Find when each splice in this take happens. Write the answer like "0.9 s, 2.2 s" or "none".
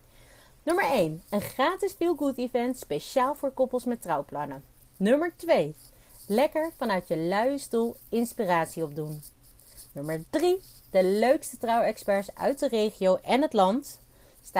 none